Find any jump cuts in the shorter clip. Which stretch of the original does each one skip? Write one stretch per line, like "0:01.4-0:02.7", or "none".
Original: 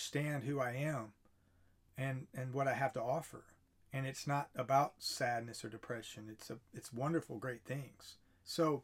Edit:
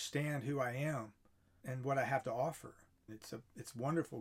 0:01.6-0:02.3
0:03.8-0:06.3